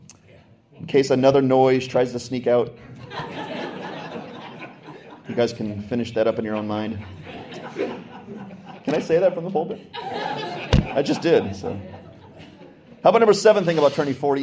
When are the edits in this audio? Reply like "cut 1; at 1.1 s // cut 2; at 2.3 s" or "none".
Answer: none